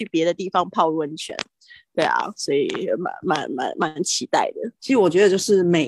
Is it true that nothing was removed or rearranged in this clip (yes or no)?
no